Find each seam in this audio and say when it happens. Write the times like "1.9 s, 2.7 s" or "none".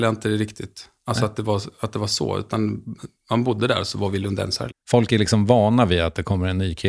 4.7 s